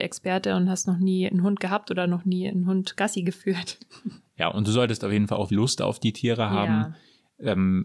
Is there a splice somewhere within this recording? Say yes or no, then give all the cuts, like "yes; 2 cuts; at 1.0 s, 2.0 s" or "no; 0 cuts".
yes; 1 cut; at 5.5 s